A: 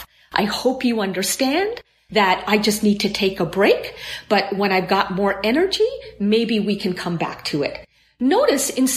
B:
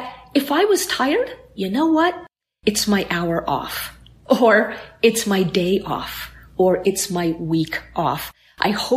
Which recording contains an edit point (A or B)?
B